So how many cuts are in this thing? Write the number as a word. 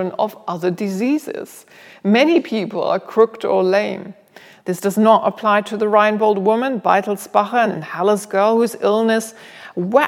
two